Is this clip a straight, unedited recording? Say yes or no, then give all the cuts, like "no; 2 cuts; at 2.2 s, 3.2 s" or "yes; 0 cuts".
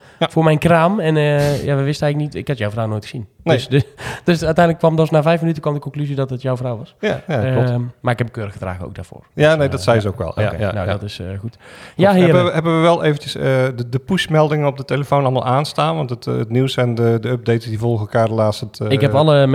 yes; 0 cuts